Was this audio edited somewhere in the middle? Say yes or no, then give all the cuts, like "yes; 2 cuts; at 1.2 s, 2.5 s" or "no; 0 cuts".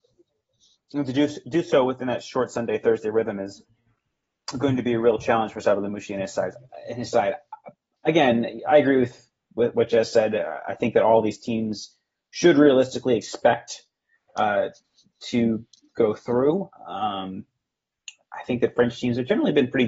no; 0 cuts